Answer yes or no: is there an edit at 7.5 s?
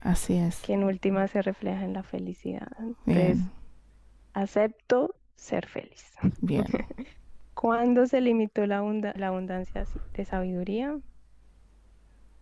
no